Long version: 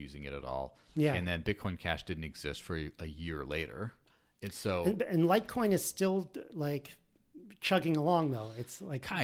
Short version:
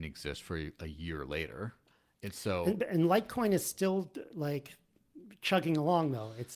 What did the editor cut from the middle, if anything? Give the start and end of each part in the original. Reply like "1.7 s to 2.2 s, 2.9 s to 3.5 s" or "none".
none